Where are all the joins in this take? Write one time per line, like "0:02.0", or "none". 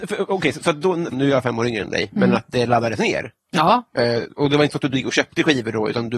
0:01.1